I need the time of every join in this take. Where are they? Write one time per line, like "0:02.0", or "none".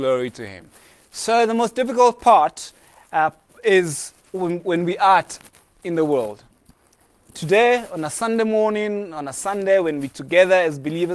none